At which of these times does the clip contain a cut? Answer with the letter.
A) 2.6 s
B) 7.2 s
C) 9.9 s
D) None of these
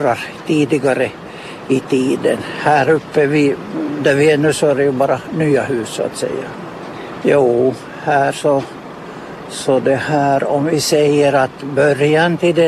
B